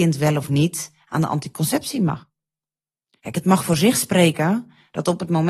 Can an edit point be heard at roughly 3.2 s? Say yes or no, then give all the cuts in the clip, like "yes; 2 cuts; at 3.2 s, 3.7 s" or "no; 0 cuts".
yes; 1 cut; at 3.2 s